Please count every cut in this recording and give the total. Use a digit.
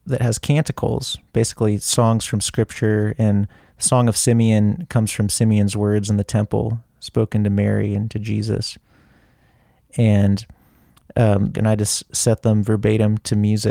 1